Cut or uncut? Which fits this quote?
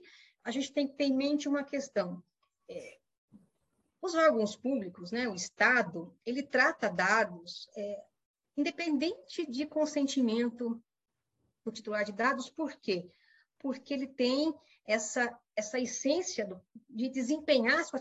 cut